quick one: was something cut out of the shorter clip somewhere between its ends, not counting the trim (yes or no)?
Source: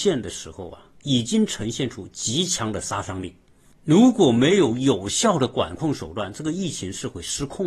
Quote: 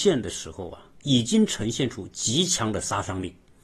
no